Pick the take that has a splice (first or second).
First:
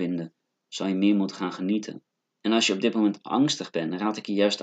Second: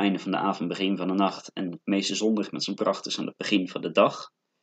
first